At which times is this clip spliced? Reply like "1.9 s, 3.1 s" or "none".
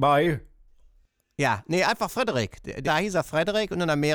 2.8 s

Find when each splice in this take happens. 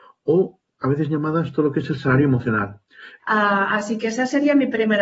3.2 s

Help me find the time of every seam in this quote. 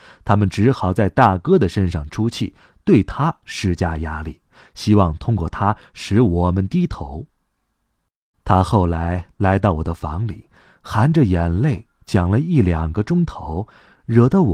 8.3 s

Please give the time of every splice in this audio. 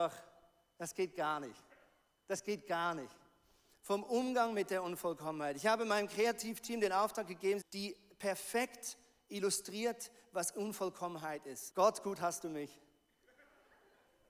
7.6 s, 11.7 s

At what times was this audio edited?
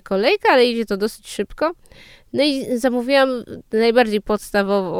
none

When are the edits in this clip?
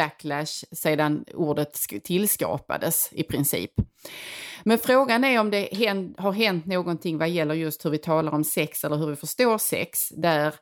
none

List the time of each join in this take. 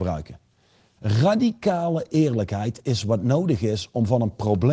1.0 s

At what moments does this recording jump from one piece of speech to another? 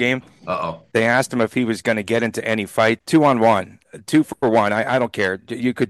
3.0 s

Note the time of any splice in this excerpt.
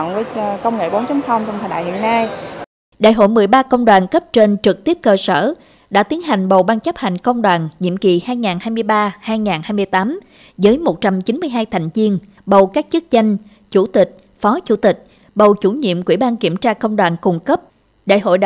12.4 s, 15.2 s

